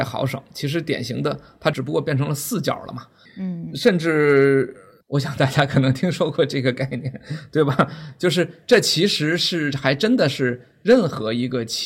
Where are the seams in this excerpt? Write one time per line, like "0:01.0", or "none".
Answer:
0:03.3
0:05.0